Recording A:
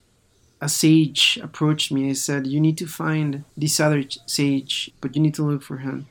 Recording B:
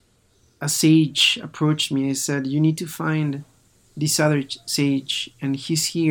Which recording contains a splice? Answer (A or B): A